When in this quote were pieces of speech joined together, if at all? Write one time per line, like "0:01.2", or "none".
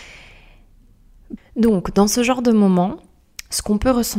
0:01.4